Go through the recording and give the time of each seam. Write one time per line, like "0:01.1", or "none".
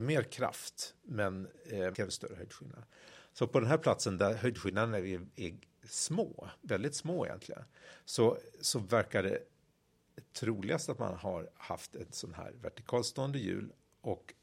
0:01.9

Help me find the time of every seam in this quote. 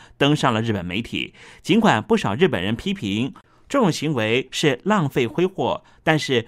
none

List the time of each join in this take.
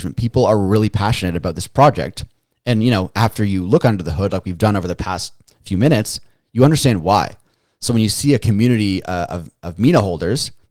none

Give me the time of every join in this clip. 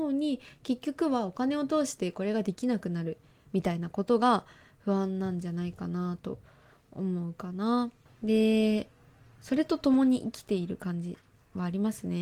0:08.1

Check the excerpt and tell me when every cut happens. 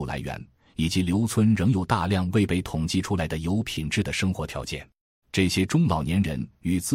0:05.2

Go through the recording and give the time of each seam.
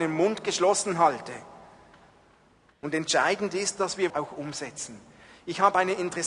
0:02.7
0:04.1

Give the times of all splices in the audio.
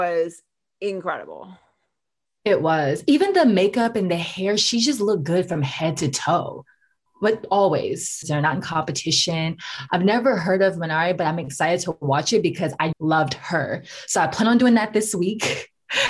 0:08.2
0:09.9
0:12.9

